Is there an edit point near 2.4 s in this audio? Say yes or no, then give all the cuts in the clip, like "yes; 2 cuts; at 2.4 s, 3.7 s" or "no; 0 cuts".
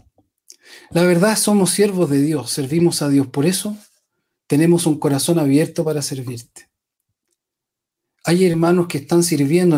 no; 0 cuts